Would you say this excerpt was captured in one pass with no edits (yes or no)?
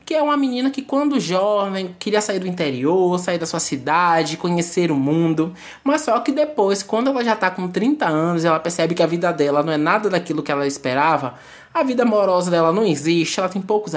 yes